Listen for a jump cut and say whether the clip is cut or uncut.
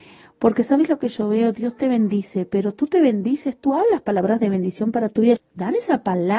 cut